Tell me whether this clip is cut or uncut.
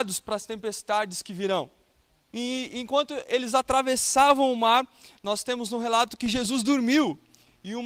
cut